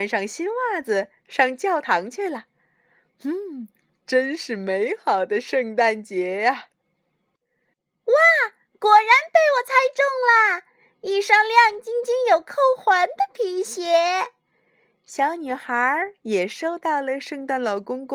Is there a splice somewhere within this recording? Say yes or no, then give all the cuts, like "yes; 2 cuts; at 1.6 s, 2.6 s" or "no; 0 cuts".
no; 0 cuts